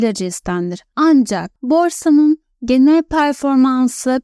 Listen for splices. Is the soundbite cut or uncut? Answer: uncut